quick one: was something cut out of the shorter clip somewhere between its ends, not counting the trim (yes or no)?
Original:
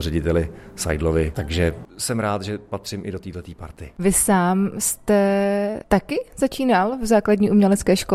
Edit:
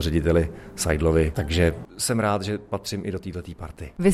no